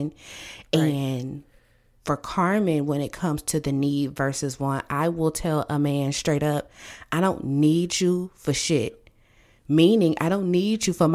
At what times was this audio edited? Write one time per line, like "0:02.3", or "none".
none

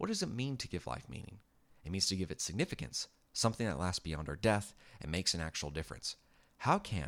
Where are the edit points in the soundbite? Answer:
none

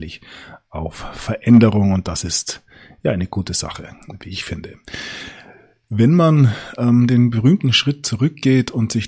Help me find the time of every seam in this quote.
none

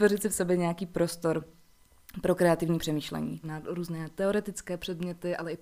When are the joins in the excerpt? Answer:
0:03.4

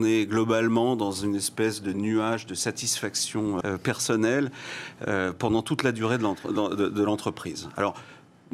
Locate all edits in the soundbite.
0:03.6

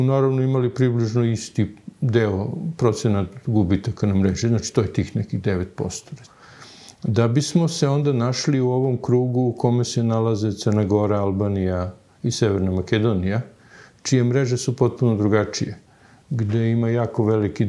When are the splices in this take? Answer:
none

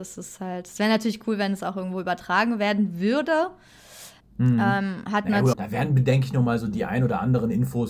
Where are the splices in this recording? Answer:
0:04.2
0:05.5

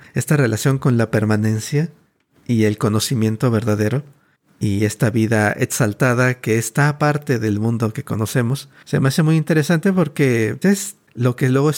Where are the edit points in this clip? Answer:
0:10.6

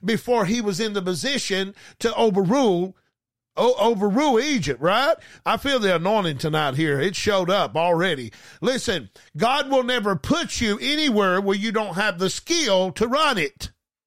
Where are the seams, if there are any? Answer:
0:05.4

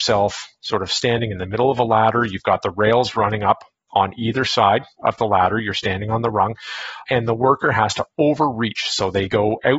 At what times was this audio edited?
0:07.0

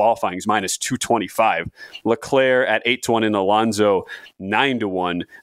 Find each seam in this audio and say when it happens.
0:02.0

